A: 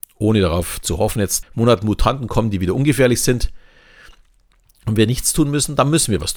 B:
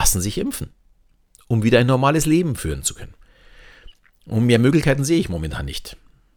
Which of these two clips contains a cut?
A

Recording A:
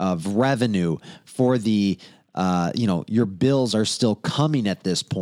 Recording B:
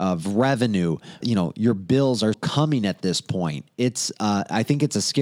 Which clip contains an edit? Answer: B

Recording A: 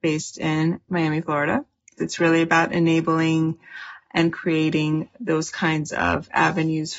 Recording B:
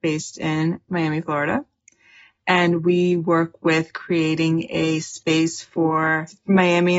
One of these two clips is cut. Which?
A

